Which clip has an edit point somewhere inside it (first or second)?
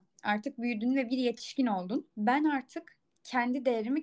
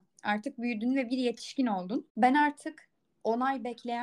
first